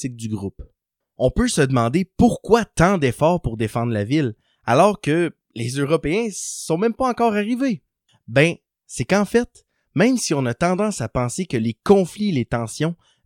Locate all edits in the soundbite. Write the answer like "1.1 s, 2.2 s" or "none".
none